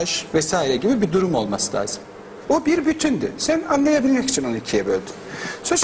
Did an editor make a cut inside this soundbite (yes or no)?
yes